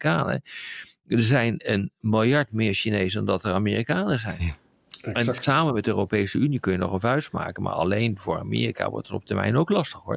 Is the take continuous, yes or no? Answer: yes